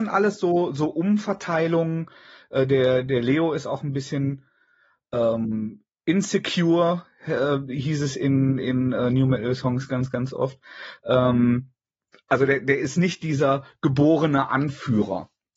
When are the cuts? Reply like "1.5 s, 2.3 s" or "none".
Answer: none